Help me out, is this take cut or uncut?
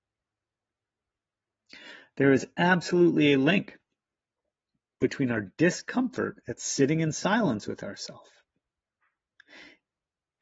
uncut